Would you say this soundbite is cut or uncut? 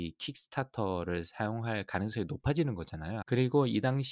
cut